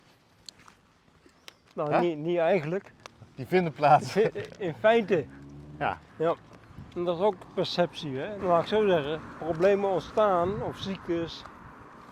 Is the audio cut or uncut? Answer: cut